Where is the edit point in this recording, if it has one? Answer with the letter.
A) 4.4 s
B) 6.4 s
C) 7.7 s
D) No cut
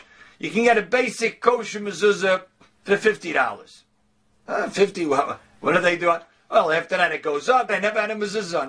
C